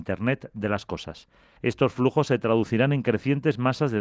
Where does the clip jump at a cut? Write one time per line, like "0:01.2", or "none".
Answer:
0:01.6